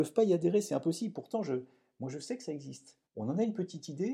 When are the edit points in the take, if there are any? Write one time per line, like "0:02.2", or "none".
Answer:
0:03.1